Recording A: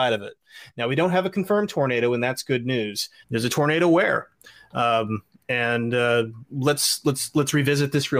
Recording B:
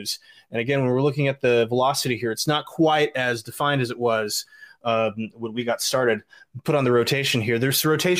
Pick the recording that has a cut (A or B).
A